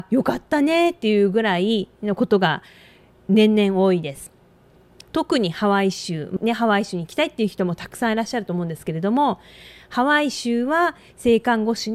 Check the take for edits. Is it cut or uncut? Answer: cut